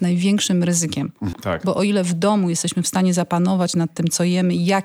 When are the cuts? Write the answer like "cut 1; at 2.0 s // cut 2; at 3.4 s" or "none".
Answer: cut 1; at 1.3 s